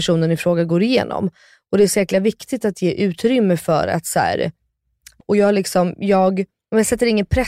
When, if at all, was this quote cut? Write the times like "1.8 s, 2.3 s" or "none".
5.2 s